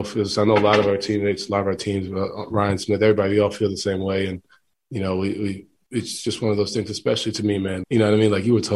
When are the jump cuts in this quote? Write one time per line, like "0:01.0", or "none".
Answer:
0:07.8